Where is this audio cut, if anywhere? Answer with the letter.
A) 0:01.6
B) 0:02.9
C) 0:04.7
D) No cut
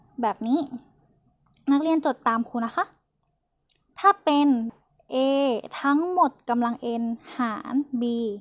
C